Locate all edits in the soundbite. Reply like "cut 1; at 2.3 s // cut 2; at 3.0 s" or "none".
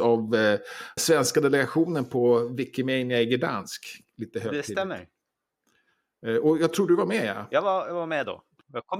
cut 1; at 1.0 s